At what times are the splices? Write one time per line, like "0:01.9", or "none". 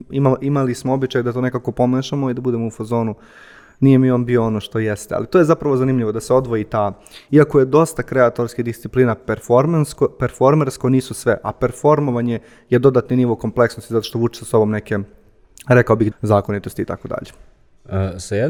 0:04.6
0:16.1